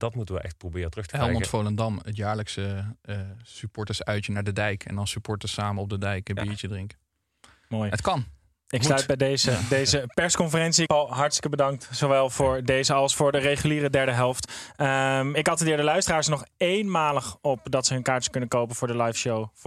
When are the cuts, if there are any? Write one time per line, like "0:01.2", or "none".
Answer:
0:10.9